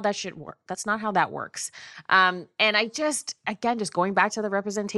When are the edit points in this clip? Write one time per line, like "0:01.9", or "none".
none